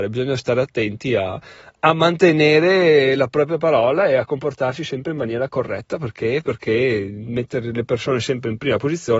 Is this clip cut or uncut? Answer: uncut